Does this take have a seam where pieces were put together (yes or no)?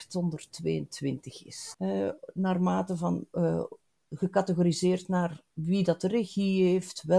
yes